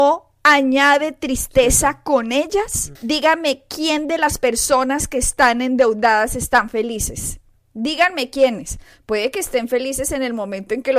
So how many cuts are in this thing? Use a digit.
1